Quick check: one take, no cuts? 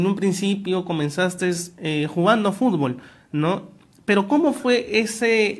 yes; 0 cuts

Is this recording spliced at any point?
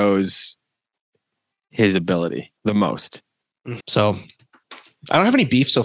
yes; 2 cuts; at 2.6 s, 3.8 s

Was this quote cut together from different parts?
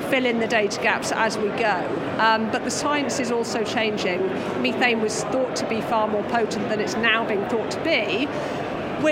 no; 0 cuts

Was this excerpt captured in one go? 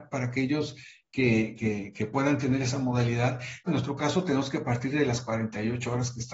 no; 2 cuts; at 1.6 s, 3.7 s

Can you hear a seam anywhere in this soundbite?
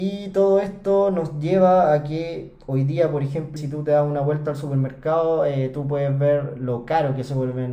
yes; 1 cut; at 3.6 s

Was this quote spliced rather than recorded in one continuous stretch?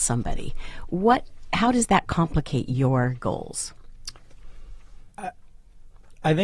no; 0 cuts

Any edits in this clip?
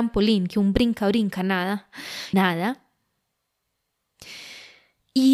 yes; 1 cut; at 2.3 s

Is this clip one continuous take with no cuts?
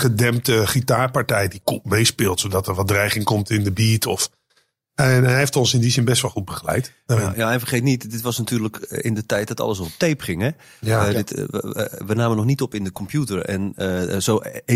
yes; 0 cuts

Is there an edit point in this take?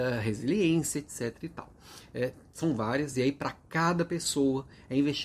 no; 0 cuts

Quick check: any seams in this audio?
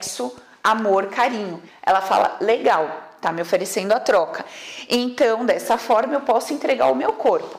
yes; 1 cut; at 1.7 s

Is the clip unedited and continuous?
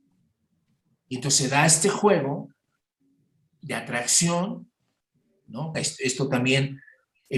no; 1 cut; at 5.7 s

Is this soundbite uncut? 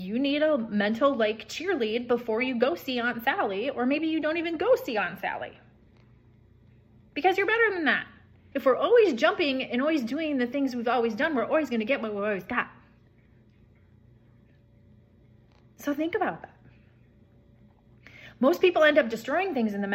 no; 1 cut; at 8.5 s

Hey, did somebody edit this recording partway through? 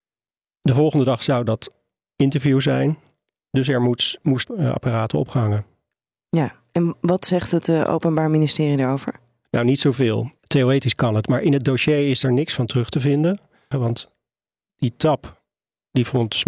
yes; 3 cuts; at 4.4 s, 10.4 s, 13.7 s

